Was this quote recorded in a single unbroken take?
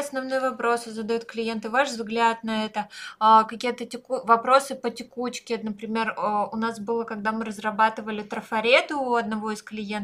yes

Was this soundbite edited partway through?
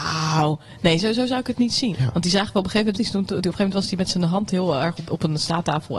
yes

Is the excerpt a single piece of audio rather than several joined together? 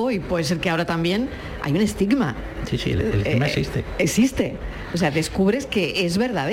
yes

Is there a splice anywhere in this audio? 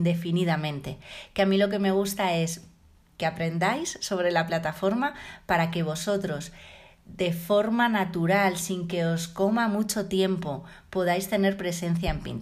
no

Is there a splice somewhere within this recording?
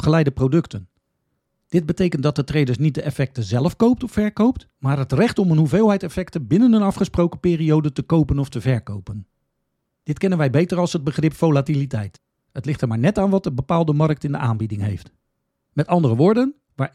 yes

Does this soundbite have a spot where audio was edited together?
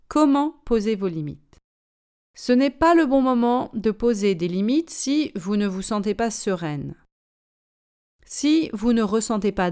no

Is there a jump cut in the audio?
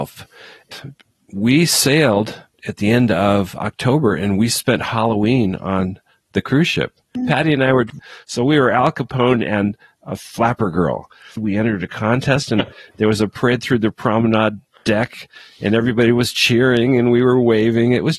yes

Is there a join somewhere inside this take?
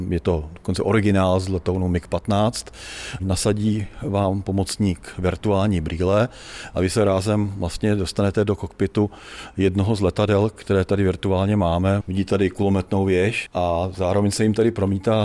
yes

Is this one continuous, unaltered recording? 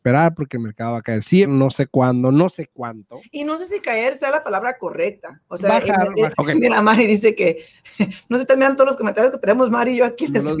no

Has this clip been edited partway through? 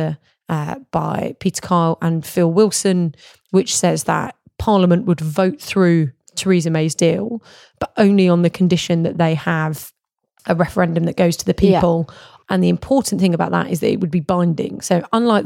yes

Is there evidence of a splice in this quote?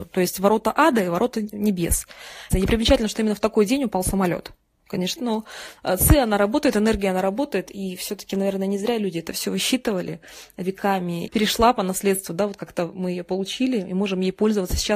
yes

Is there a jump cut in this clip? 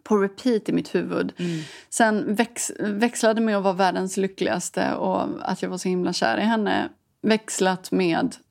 no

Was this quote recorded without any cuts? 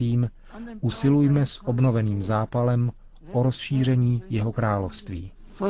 yes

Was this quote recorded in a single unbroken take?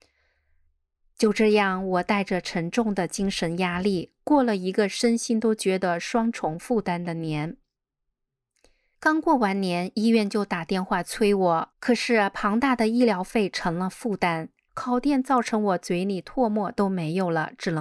no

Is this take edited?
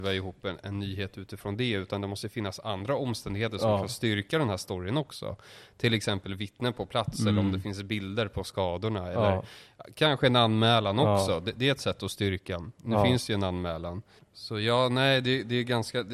no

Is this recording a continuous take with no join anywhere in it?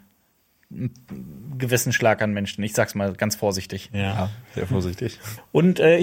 yes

